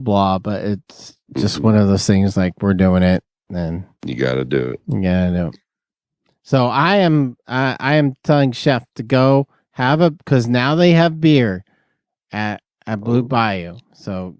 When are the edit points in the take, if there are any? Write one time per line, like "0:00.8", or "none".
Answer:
none